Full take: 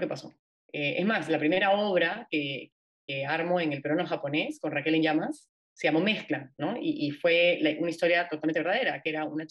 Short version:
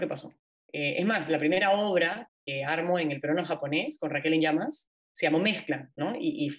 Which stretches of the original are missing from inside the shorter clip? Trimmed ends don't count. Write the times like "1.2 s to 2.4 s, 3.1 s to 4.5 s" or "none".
2.3 s to 2.9 s